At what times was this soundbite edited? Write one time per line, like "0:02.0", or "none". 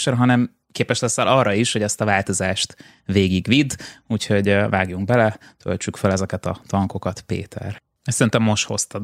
0:08.0